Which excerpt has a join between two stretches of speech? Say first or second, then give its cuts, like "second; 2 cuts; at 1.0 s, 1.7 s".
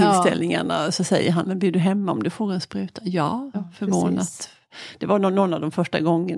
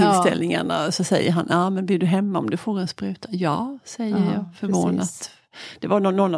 first; 2 cuts; at 1.4 s, 3.5 s